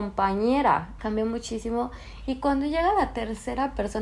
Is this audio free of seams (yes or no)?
no